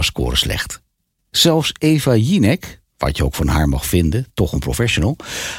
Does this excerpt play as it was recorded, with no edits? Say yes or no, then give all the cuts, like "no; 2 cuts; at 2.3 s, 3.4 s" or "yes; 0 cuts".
yes; 0 cuts